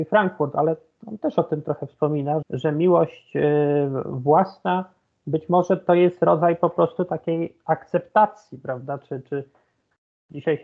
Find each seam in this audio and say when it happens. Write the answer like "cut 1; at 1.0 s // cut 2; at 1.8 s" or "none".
cut 1; at 2.4 s